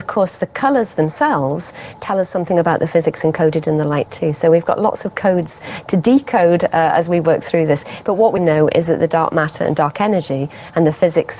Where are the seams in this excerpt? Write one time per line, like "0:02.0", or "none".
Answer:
0:08.4

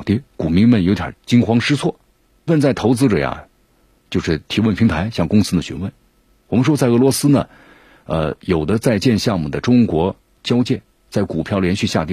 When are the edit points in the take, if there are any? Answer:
0:02.5

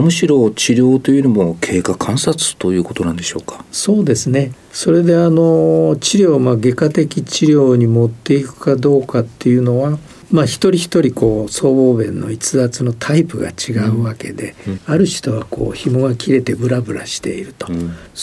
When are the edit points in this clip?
none

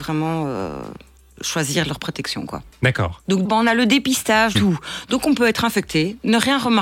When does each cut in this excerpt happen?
0:03.4
0:04.5

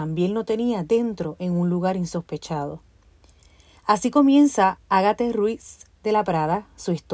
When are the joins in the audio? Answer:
none

